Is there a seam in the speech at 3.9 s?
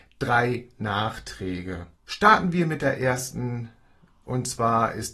no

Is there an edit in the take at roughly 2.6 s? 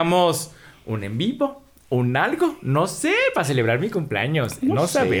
no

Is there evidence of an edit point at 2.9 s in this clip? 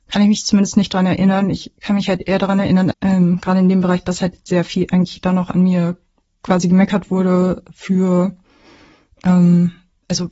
yes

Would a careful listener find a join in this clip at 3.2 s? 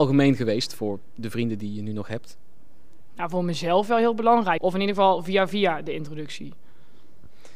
no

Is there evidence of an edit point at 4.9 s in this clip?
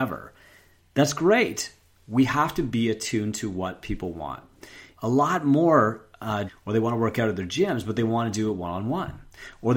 yes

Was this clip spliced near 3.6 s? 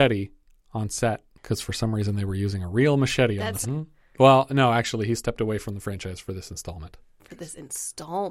yes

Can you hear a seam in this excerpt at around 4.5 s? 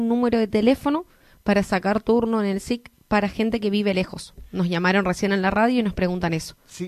no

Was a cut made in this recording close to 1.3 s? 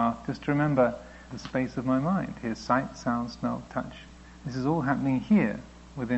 yes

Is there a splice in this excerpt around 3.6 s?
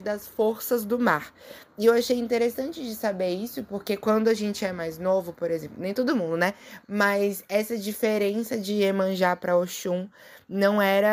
no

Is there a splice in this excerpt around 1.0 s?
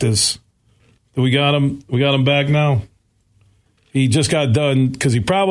yes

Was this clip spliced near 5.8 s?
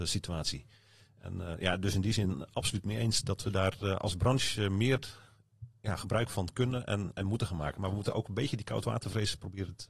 yes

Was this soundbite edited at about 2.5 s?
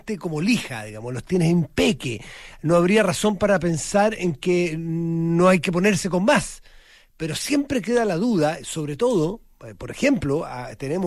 no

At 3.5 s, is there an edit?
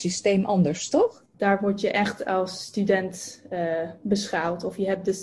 no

